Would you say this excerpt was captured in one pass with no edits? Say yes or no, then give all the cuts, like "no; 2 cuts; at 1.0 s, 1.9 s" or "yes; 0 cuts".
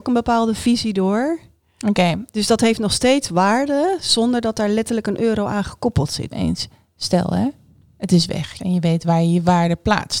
no; 2 cuts; at 6.3 s, 8.6 s